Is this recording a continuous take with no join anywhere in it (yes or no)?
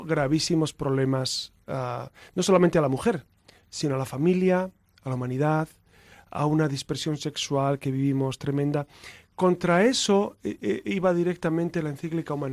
yes